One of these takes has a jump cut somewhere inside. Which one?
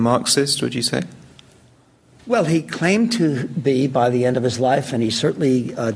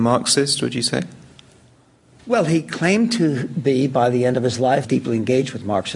second; 1 cut; at 4.8 s

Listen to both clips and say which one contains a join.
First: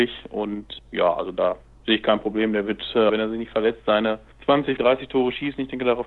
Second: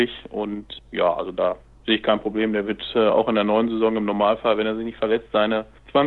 first; 2 cuts; at 3.1 s, 4.8 s

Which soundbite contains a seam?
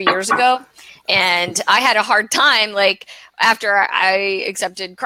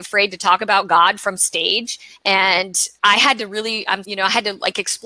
second; 2 cuts; at 3.0 s, 4.0 s

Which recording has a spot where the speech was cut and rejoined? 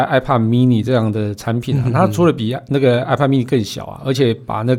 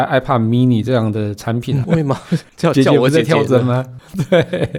second; 1 cut; at 1.8 s

